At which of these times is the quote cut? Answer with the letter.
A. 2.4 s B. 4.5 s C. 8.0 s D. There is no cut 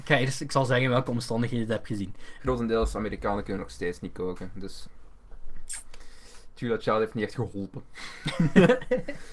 A